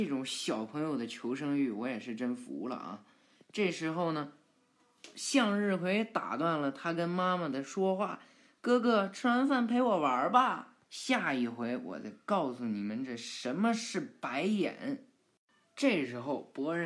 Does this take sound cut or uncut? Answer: cut